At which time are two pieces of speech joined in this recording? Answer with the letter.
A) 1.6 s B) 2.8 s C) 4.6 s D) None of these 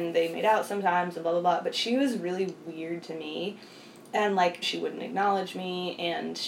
C